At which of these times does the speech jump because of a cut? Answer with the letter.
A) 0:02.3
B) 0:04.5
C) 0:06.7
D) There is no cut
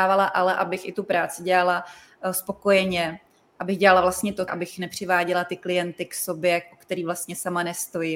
B